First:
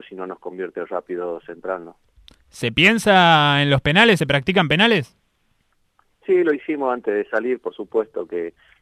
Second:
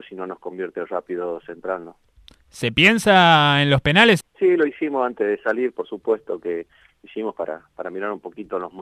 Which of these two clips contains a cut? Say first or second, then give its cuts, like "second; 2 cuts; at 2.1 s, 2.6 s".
second; 1 cut; at 4.2 s